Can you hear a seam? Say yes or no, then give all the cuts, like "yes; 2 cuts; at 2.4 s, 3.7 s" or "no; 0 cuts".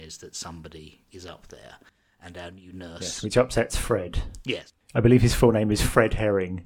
no; 0 cuts